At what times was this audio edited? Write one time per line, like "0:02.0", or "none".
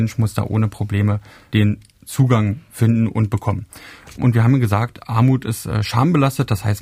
none